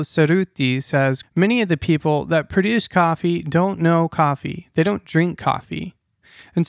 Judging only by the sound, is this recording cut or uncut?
cut